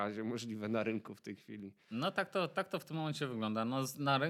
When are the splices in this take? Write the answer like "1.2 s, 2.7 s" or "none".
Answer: none